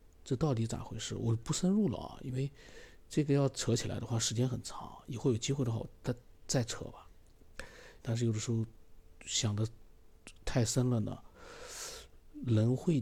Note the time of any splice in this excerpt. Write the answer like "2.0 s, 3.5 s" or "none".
8.0 s